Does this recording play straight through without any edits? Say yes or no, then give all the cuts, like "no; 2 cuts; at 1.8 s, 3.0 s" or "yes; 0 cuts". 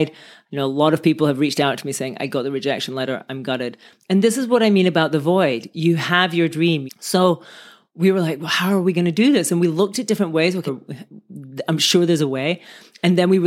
no; 2 cuts; at 6.9 s, 10.7 s